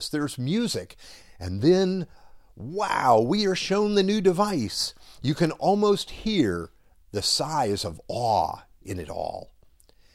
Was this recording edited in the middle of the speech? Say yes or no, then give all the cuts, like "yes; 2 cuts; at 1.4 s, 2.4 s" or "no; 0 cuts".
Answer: yes; 1 cut; at 1.2 s